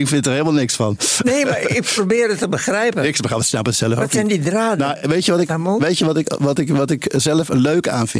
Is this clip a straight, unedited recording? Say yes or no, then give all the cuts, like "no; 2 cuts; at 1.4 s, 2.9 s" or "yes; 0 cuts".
yes; 0 cuts